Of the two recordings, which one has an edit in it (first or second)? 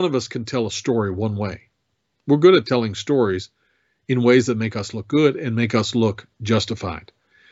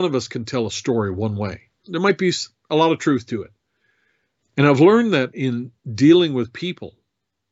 second